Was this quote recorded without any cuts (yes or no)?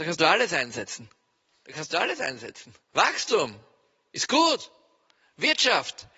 no